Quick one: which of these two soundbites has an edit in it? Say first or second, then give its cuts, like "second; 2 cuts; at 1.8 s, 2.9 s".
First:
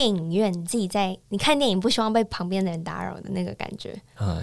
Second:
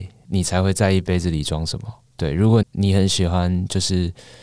second; 1 cut; at 2.6 s